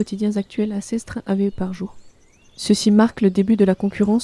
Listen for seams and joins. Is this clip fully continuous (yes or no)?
yes